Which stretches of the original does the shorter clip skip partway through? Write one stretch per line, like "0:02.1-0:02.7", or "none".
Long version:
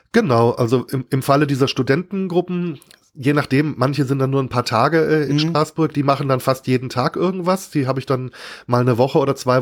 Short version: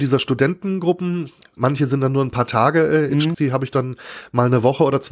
0:03.1-0:03.7
0:05.5-0:07.7